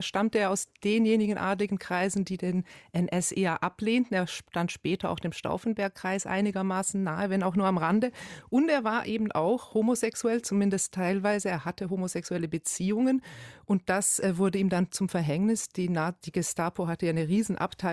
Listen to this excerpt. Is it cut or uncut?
uncut